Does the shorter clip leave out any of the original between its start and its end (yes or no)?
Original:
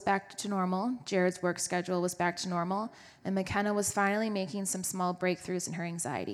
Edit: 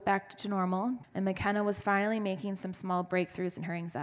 yes